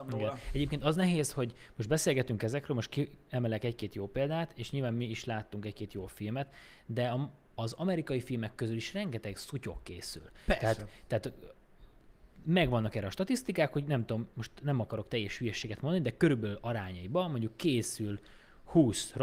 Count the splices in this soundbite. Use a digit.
0